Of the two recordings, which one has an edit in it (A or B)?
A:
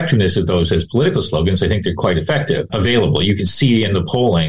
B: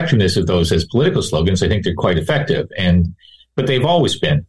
A